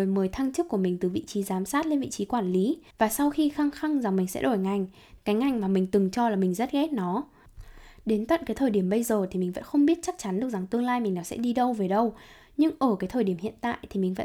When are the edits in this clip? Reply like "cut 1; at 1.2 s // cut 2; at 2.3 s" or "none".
cut 1; at 2.9 s // cut 2; at 5.2 s